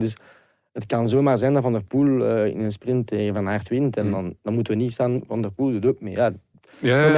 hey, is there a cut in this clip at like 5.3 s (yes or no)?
yes